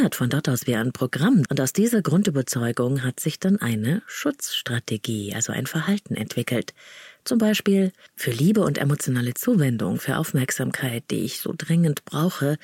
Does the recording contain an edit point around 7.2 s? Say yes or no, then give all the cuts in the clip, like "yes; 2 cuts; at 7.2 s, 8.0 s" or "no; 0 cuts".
no; 1 cut; at 1.5 s